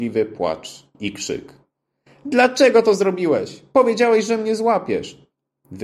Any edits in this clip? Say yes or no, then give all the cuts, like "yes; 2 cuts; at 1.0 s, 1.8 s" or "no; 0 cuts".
no; 0 cuts